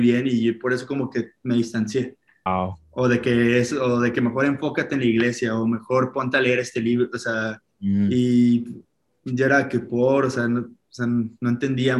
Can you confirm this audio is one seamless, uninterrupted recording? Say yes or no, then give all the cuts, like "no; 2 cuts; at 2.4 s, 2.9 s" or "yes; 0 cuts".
no; 1 cut; at 2.5 s